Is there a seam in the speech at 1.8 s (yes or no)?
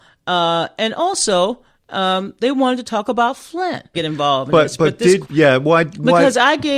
no